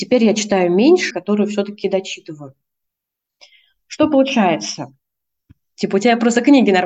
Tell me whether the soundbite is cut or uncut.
cut